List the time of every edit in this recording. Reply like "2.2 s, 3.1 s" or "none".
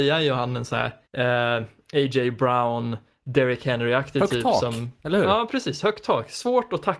1.1 s